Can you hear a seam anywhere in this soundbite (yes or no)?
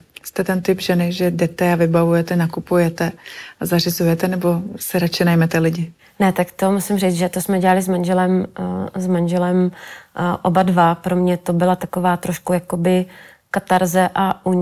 no